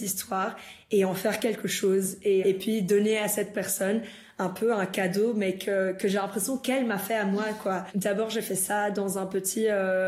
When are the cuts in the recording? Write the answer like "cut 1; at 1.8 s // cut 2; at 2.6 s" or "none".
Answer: cut 1; at 2.4 s // cut 2; at 7.9 s